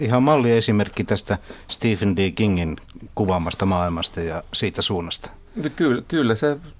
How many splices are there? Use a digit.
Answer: 0